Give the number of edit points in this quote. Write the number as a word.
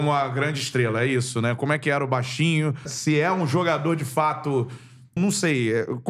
two